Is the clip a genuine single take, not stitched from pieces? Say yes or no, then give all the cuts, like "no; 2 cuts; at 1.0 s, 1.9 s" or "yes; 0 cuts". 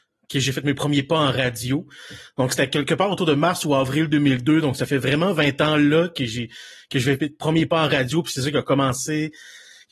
yes; 0 cuts